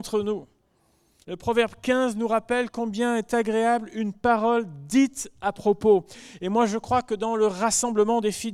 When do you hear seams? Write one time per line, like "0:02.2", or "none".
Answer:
0:01.2